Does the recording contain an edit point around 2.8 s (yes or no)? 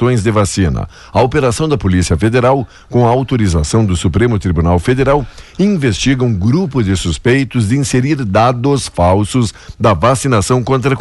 no